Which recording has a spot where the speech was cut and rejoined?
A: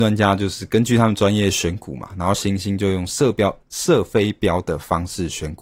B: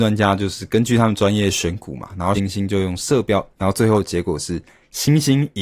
B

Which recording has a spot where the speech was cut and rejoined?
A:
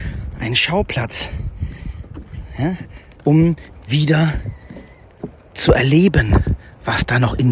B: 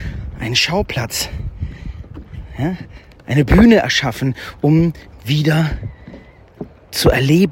A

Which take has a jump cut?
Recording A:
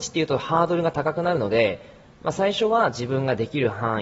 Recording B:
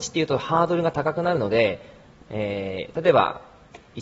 B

